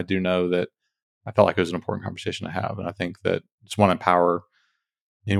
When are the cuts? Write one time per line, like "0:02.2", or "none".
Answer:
none